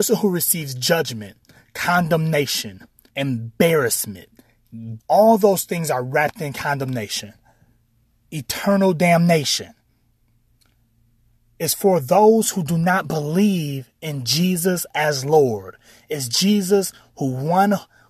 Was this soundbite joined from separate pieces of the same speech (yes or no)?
yes